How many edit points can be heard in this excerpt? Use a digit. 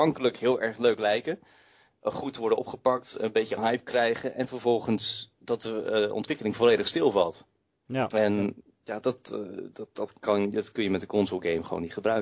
0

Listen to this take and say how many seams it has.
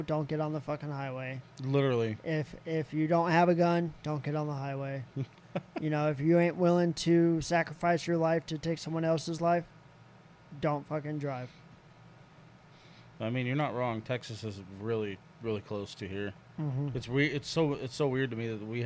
0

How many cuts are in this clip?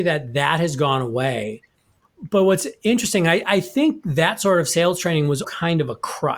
2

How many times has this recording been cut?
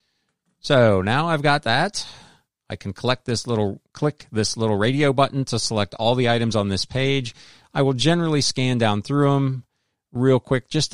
1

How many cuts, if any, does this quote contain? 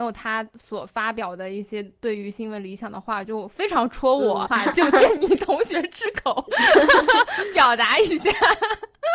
1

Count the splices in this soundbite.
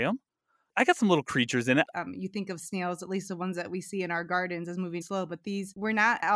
2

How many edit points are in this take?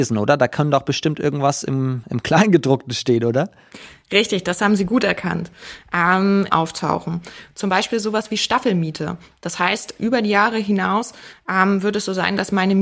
1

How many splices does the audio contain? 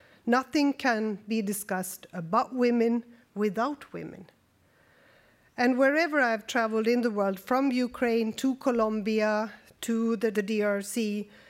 1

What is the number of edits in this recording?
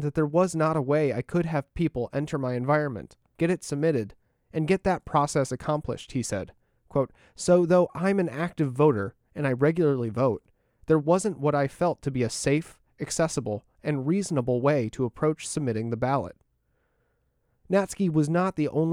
1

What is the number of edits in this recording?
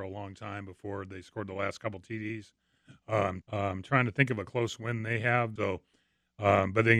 2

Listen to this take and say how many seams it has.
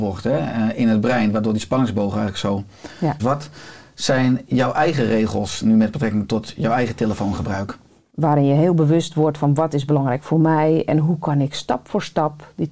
2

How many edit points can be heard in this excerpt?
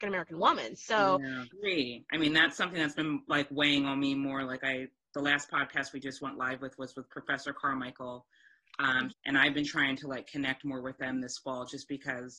2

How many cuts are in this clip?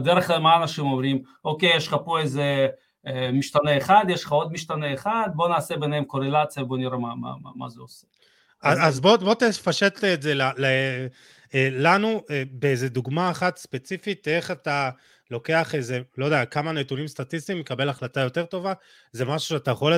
0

